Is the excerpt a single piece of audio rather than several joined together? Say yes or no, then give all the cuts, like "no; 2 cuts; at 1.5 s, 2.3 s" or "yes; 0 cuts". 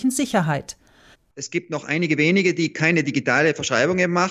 no; 1 cut; at 1.1 s